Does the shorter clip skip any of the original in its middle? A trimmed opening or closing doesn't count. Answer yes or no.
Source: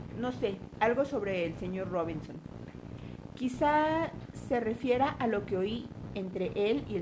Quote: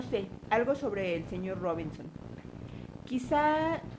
no